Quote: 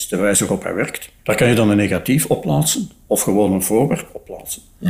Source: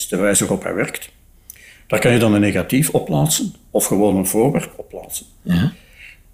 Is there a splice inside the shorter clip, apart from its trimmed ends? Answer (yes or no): yes